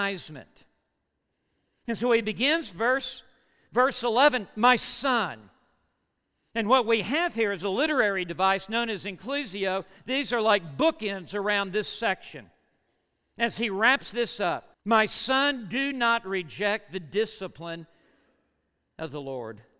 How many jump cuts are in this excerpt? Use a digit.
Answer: 2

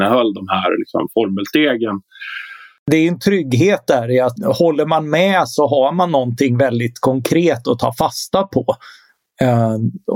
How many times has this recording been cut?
1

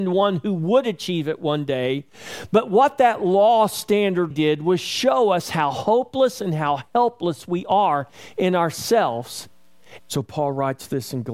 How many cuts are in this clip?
2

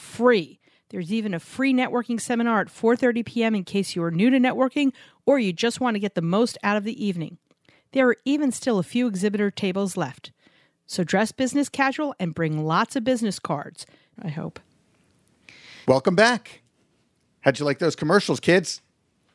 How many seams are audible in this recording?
2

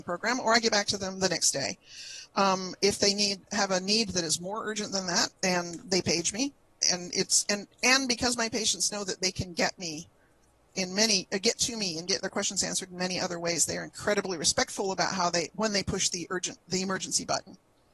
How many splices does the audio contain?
2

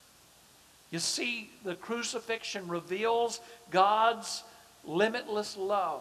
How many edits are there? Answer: 0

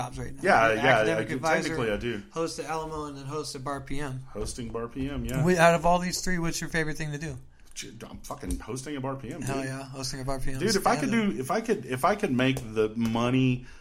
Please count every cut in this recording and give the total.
0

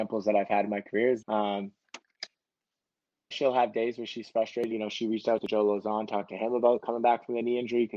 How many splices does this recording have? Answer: 3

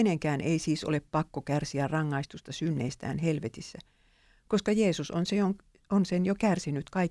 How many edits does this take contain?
0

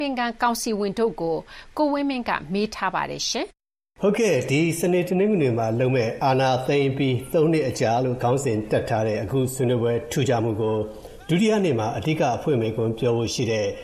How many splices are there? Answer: 1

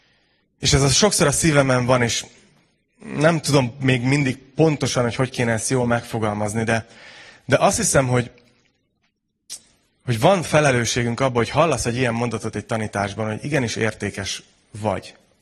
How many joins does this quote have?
0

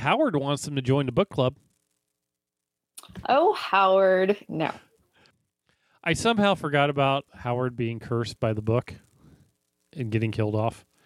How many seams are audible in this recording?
1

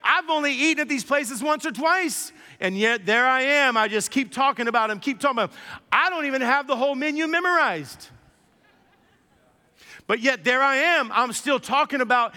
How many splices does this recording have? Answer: 0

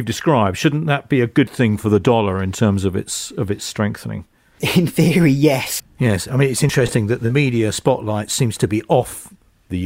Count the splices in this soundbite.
1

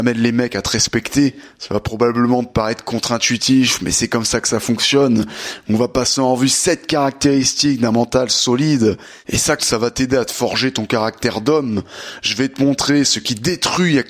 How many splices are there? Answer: 1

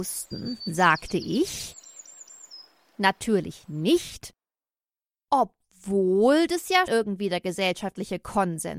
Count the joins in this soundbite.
1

